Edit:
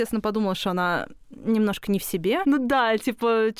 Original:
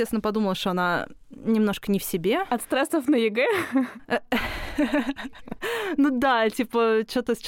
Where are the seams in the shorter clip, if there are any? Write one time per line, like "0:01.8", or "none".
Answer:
0:02.4